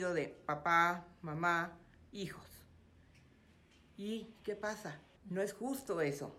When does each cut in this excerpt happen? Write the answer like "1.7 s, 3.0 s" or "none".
5.2 s

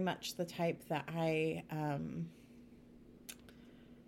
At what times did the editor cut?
none

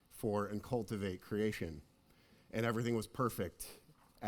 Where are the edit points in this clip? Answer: none

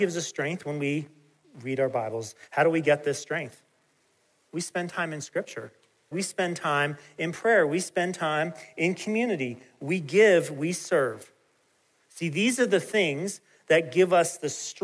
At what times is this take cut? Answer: 2.4 s, 6.1 s

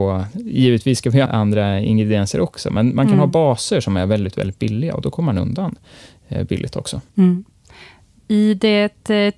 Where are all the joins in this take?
1.3 s, 7.1 s

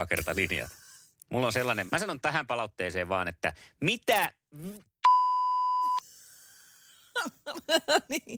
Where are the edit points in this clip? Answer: 1.9 s

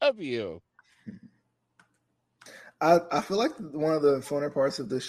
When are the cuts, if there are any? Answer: none

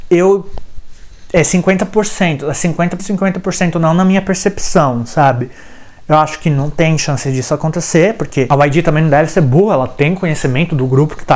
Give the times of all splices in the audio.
3.0 s

